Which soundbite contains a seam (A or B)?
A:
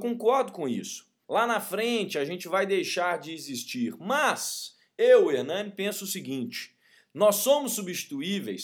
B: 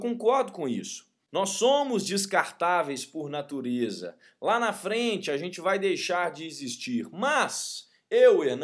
A